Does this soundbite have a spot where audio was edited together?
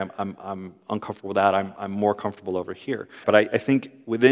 yes; 1 cut; at 3.2 s

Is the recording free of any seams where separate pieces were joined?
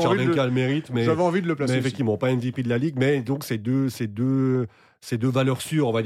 yes; 0 cuts

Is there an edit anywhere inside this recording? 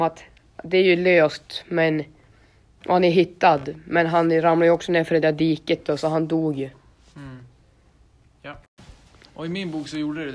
yes; 1 cut; at 9.3 s

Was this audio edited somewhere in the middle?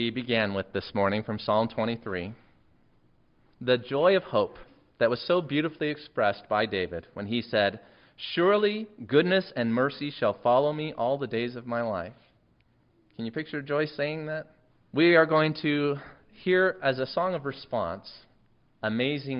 yes; 1 cut; at 14.7 s

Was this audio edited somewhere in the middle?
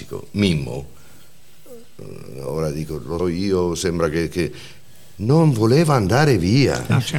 yes; 1 cut; at 3.2 s

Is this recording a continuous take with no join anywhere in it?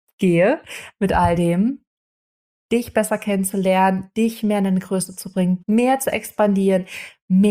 no; 2 cuts; at 2.6 s, 5.6 s

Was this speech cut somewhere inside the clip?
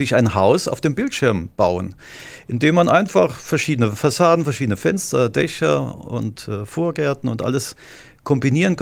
no; 0 cuts

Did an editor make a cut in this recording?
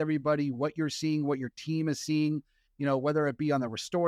no; 0 cuts

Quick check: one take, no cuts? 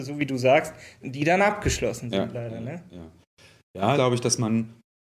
no; 2 cuts; at 1.0 s, 3.9 s

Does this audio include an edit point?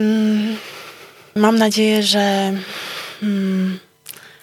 yes; 1 cut; at 1.4 s

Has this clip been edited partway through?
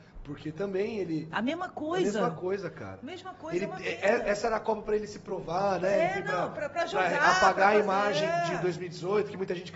no; 0 cuts

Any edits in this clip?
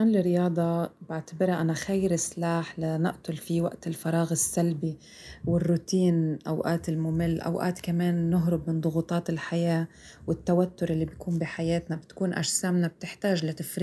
no; 0 cuts

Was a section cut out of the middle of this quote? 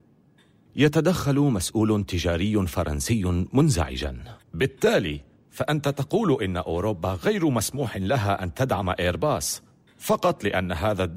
yes; 1 cut; at 4.4 s

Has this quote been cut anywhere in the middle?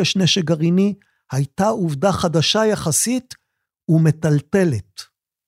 no; 0 cuts

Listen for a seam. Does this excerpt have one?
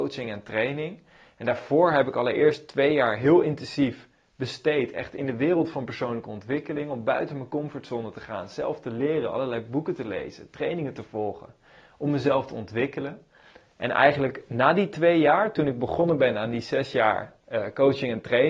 no; 0 cuts

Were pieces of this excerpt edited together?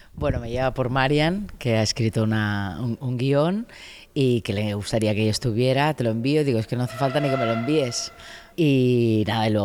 yes; 1 cut; at 8.5 s

